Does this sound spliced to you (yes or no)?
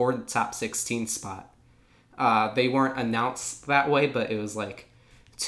no